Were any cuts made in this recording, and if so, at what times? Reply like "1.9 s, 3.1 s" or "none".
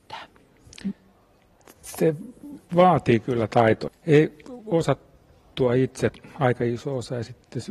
3.9 s

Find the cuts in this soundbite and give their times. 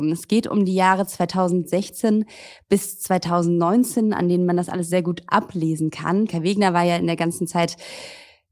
6.3 s

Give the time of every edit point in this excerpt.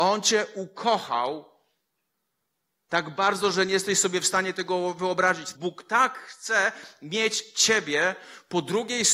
5.5 s

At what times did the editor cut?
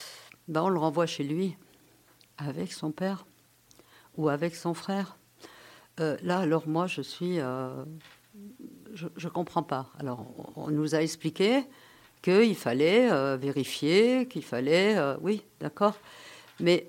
none

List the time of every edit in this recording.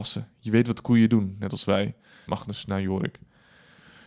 2.3 s

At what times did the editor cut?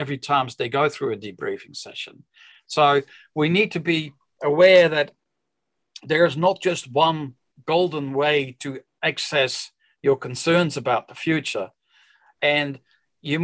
12.3 s

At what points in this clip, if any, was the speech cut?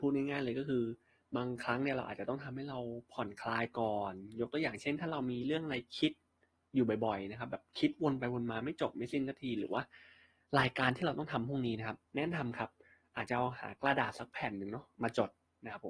12.1 s

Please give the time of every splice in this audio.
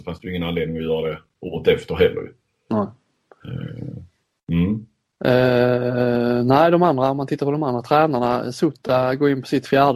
none

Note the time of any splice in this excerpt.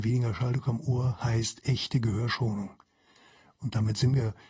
none

